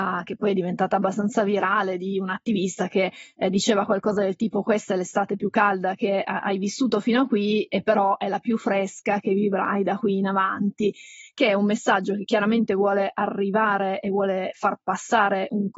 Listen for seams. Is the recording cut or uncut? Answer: uncut